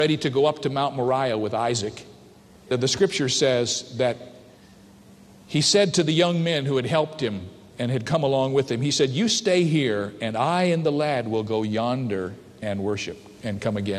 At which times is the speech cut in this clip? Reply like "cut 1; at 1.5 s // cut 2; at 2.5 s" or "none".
none